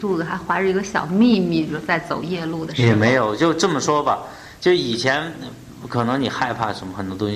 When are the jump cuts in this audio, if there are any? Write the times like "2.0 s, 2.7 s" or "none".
none